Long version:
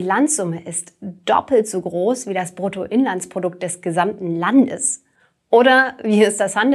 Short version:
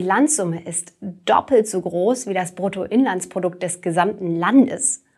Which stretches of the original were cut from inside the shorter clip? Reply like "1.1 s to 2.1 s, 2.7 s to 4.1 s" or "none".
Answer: none

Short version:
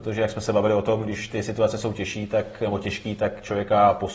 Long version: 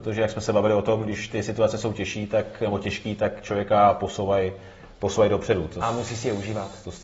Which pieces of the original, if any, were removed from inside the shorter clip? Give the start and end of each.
none

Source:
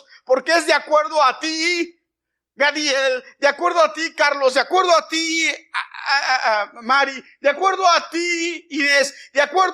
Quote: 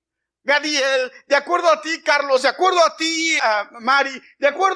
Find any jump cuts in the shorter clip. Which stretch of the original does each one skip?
5.5 s to 6.4 s

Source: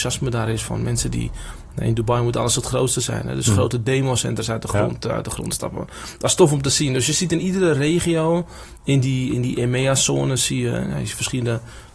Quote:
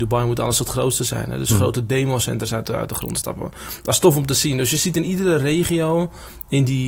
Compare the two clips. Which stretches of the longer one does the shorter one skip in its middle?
4.6 s to 5.0 s

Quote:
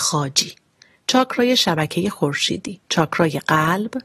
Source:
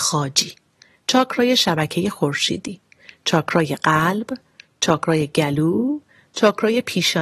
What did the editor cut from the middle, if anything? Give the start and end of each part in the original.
2.8 s to 3.2 s

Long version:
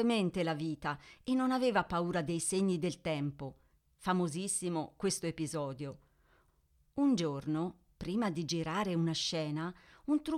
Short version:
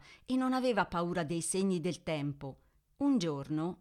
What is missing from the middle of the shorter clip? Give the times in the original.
3.9 s to 6.8 s

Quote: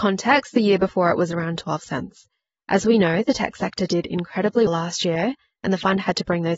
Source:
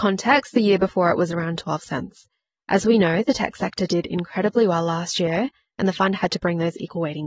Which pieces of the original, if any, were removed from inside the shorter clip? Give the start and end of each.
4.7 s to 4.8 s

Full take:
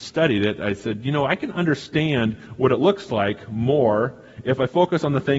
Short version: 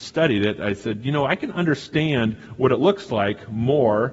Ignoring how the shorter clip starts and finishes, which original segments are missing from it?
none

